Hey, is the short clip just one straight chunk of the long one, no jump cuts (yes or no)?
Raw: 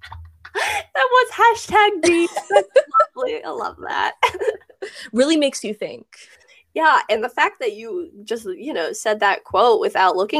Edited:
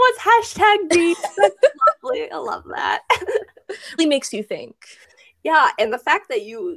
no